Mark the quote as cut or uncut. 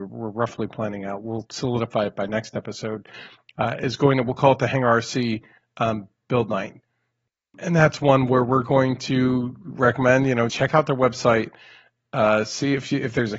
cut